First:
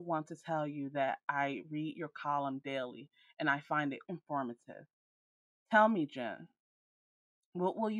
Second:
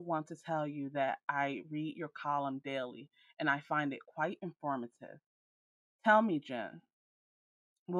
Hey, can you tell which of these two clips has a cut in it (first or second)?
first